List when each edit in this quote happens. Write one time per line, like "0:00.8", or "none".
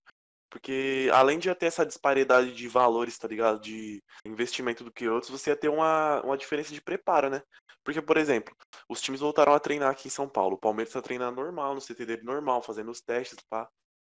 0:04.3